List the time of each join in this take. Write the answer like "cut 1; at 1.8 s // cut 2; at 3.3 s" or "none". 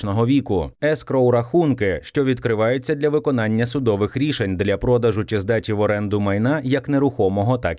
none

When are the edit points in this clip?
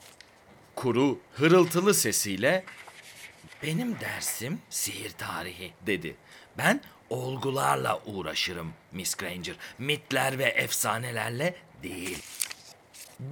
cut 1; at 5.8 s

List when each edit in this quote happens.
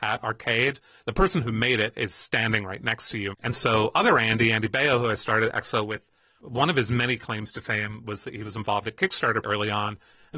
cut 1; at 3.3 s // cut 2; at 9.4 s

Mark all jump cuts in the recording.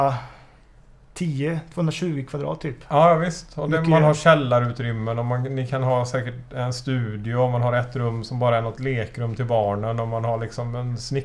none

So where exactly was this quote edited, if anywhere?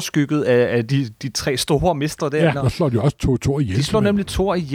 cut 1; at 2.5 s

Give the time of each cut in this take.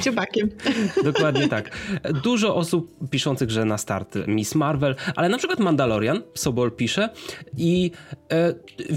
none

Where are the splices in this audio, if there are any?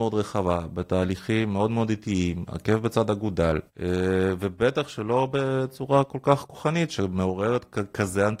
cut 1; at 3.7 s

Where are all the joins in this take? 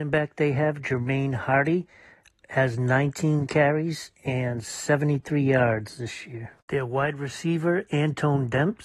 none

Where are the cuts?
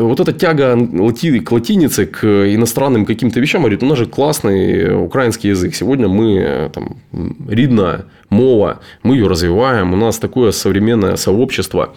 none

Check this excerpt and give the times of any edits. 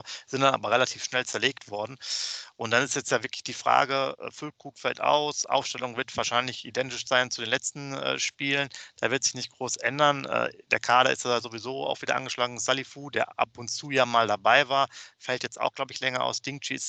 none

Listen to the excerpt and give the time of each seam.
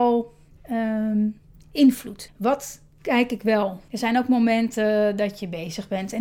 cut 1; at 2.3 s // cut 2; at 3.9 s

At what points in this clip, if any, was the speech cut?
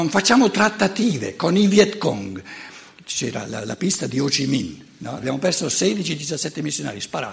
cut 1; at 5.2 s

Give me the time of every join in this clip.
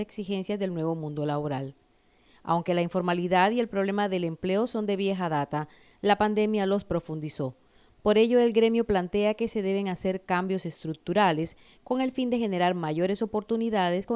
none

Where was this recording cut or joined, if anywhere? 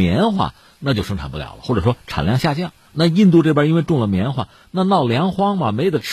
cut 1; at 2.9 s

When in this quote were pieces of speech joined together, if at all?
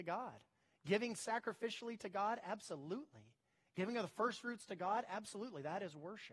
none

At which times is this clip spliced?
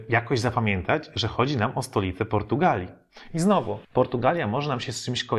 cut 1; at 3.8 s

